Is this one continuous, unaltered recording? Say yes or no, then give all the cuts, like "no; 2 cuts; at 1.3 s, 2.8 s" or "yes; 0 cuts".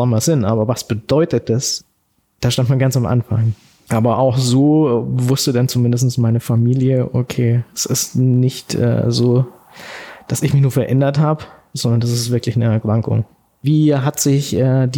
yes; 0 cuts